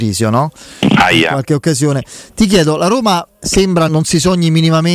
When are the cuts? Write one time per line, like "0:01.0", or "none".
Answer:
0:03.9